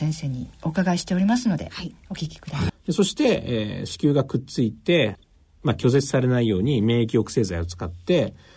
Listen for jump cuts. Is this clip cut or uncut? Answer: cut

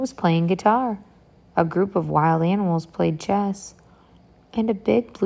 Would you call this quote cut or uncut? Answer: uncut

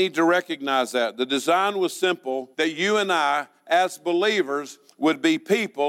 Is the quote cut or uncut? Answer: cut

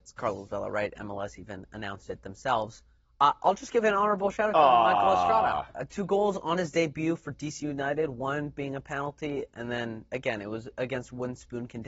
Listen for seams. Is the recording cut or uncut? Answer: uncut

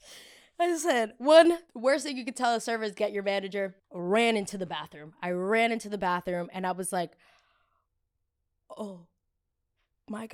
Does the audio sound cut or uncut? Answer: cut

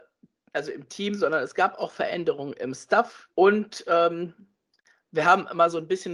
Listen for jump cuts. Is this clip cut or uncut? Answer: cut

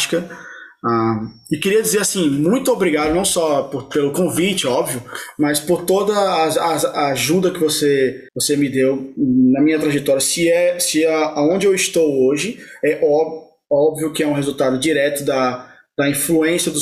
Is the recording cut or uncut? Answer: cut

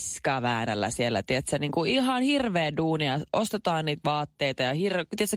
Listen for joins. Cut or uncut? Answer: uncut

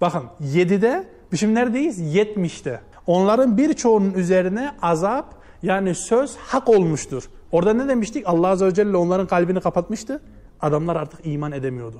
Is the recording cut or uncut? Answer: cut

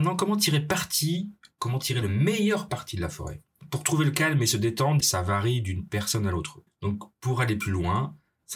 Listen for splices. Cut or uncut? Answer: cut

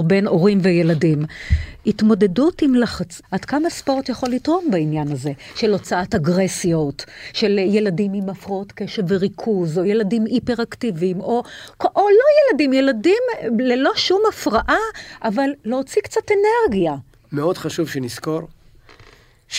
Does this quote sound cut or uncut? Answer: cut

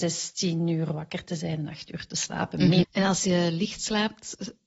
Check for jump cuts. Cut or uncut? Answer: cut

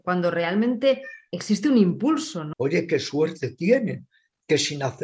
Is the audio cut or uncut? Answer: cut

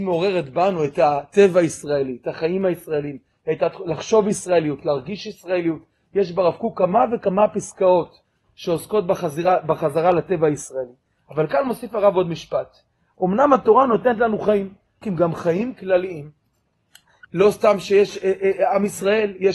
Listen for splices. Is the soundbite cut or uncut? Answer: cut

